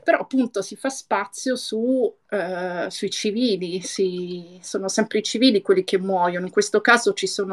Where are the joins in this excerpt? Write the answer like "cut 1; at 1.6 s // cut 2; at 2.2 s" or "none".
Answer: none